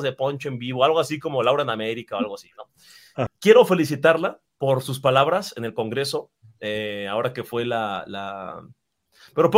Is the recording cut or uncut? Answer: cut